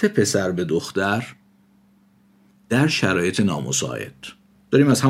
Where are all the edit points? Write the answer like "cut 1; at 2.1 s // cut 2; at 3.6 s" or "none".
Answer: none